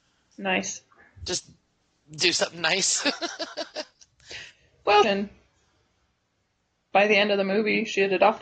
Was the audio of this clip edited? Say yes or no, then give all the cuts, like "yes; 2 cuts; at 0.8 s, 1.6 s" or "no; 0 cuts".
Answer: yes; 1 cut; at 5.0 s